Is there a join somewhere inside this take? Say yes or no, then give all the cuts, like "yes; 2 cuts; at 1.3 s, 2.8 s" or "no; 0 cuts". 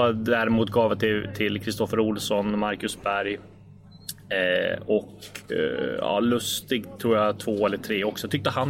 no; 0 cuts